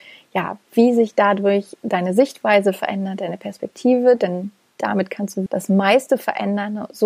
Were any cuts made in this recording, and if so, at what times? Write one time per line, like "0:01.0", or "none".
0:05.5